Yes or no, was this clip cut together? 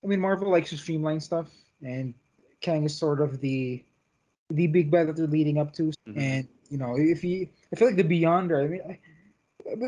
yes